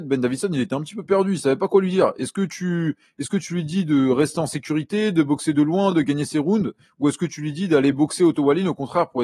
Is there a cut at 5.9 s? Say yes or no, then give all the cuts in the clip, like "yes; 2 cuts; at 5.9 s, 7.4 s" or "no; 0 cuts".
no; 0 cuts